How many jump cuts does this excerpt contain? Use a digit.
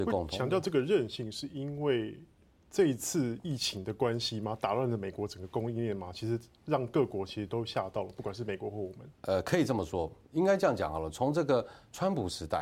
1